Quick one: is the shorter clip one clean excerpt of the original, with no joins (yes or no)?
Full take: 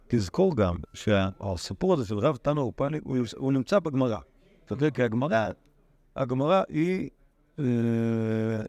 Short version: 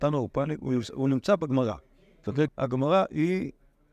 no